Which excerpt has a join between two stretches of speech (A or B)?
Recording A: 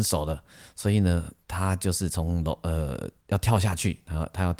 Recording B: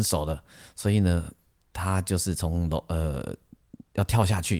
A